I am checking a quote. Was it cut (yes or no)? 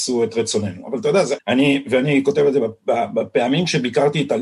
yes